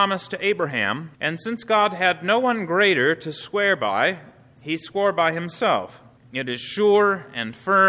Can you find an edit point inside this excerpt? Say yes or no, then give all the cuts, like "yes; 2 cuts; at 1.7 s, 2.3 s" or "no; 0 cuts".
yes; 2 cuts; at 1.1 s, 6.2 s